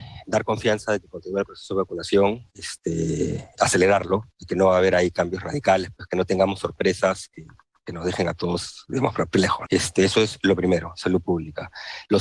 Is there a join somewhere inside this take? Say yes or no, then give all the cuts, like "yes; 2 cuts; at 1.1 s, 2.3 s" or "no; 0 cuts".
yes; 1 cut; at 9.7 s